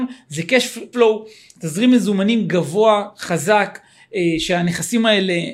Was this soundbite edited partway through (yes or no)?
yes